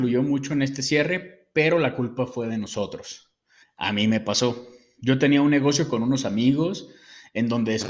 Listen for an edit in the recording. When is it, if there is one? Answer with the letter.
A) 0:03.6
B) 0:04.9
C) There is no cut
A